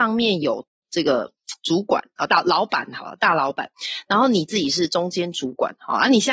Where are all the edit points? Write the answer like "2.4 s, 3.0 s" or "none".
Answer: none